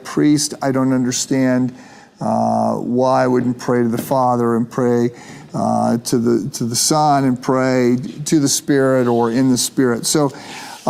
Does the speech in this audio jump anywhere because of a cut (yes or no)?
no